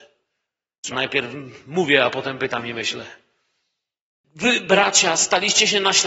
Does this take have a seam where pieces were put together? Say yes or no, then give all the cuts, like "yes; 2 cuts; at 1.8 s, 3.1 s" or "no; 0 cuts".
yes; 2 cuts; at 0.9 s, 4.2 s